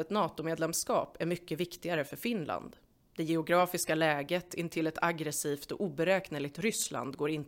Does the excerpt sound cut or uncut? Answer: uncut